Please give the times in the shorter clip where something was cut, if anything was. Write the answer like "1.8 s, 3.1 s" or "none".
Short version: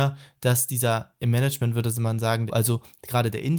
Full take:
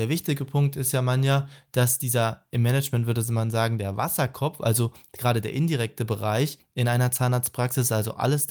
2.5 s